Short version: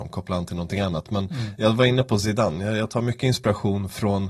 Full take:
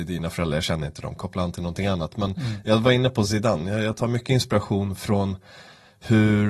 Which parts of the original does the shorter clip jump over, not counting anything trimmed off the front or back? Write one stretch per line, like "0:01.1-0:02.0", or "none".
none